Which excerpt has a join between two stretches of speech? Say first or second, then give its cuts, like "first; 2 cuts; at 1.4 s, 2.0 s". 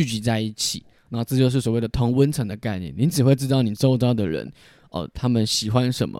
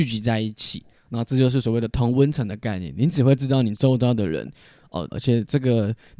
second; 1 cut; at 5.1 s